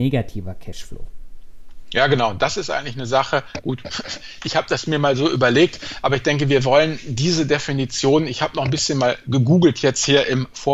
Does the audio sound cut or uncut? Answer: uncut